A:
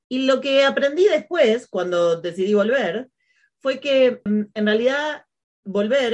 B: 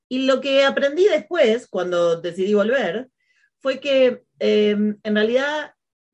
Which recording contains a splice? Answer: A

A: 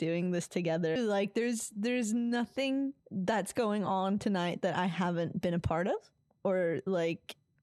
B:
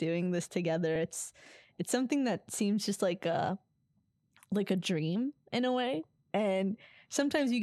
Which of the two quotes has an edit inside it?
A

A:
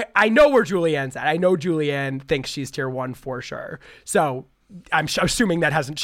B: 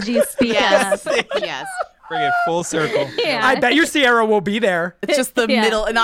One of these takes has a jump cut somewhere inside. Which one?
B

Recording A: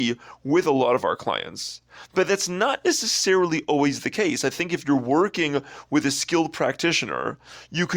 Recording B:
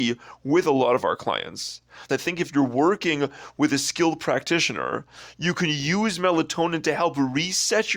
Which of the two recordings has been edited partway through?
B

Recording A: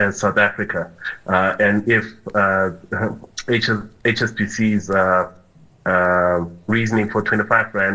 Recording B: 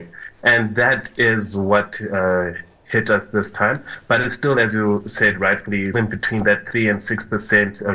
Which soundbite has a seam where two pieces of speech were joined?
B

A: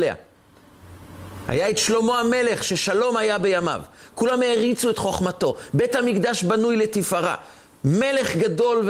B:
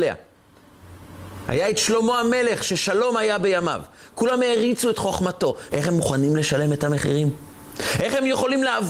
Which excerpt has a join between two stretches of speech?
B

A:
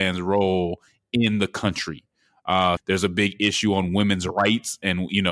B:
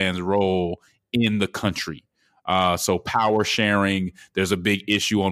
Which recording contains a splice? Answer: A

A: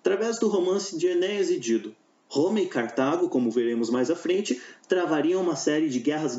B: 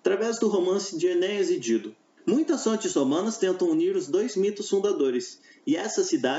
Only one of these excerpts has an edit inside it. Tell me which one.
B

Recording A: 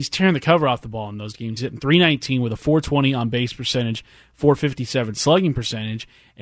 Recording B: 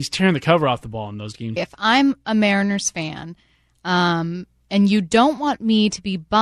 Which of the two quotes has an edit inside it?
B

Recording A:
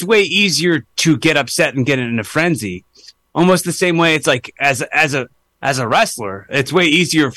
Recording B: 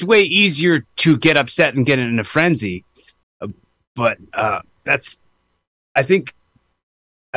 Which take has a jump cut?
B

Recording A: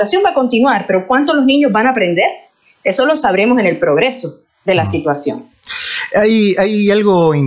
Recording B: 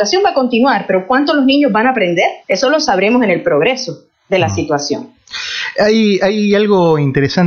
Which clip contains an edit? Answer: B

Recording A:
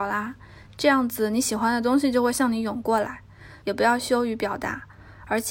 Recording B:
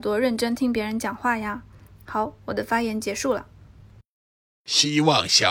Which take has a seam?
A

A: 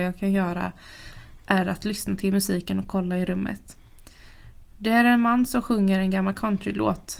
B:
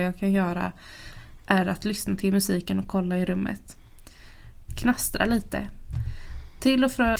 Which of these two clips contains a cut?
B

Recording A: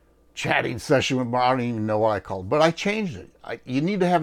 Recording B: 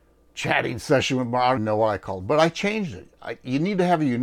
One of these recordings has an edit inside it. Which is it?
B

